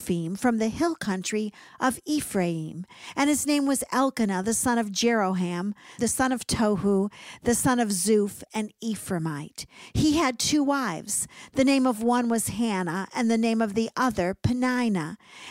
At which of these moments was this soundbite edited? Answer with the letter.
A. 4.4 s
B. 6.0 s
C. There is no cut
B